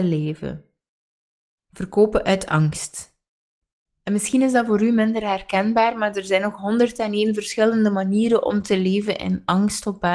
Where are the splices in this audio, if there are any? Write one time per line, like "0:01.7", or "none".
none